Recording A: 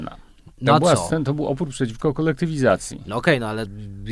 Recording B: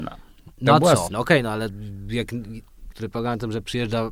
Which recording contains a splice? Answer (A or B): B